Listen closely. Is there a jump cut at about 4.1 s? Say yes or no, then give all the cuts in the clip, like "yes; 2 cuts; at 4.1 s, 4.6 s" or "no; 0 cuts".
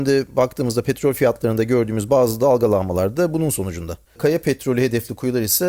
yes; 1 cut; at 4.1 s